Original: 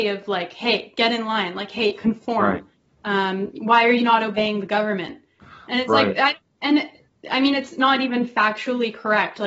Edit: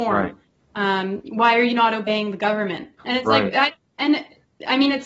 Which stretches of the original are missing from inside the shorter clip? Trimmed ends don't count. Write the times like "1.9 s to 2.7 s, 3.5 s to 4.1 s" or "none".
5.3 s to 5.6 s